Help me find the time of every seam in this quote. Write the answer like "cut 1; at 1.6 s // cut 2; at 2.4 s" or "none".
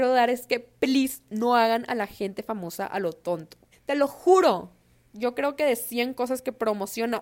cut 1; at 3.7 s